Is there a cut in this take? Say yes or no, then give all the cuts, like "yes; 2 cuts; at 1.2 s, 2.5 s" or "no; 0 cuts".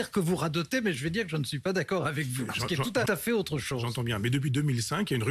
yes; 1 cut; at 3.1 s